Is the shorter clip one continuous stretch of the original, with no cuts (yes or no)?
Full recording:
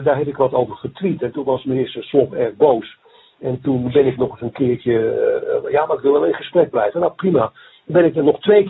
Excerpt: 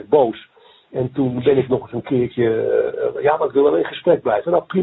yes